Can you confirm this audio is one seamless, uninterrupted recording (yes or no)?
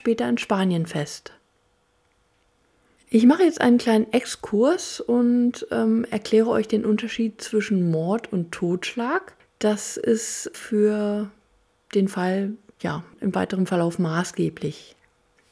yes